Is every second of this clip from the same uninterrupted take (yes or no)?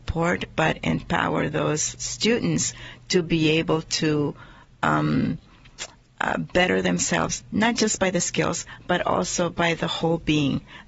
yes